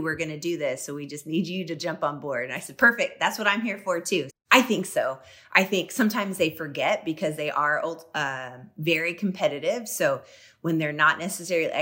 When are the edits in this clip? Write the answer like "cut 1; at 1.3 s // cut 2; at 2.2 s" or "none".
cut 1; at 4.3 s